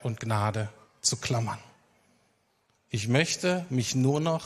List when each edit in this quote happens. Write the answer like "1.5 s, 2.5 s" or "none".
none